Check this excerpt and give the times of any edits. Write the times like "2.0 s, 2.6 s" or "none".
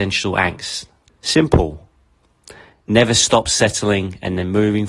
1.1 s, 2.7 s